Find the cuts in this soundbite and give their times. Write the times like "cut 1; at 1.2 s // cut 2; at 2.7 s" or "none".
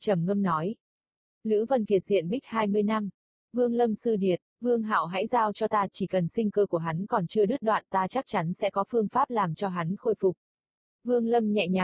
cut 1; at 3.3 s